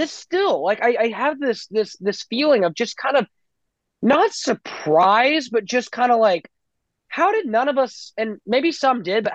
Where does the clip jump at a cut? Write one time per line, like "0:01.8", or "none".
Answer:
none